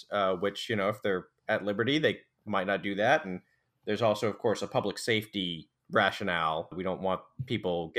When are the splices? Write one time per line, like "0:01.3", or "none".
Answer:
none